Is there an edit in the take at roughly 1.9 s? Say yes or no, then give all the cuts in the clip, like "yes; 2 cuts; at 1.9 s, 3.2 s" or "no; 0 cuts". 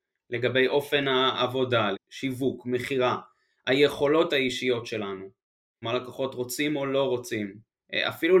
yes; 2 cuts; at 1.9 s, 5.8 s